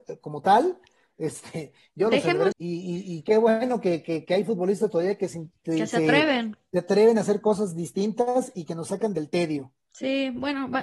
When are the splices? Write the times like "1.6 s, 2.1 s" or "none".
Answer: 2.5 s